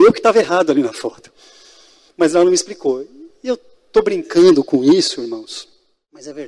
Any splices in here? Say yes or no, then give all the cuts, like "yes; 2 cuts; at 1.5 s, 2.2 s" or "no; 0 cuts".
no; 0 cuts